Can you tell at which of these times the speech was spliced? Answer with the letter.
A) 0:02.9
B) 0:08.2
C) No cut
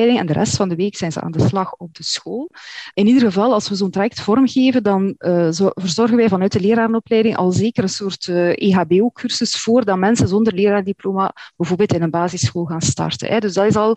A